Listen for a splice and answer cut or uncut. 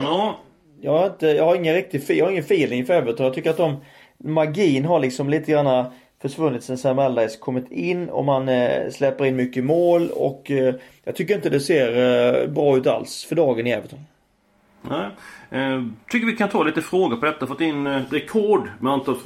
uncut